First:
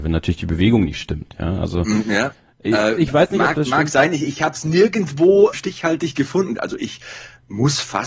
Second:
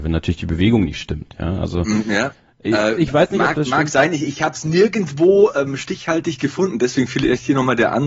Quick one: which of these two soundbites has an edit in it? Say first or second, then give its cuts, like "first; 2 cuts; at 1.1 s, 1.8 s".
first; 2 cuts; at 5.5 s, 6.6 s